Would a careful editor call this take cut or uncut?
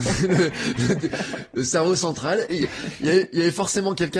cut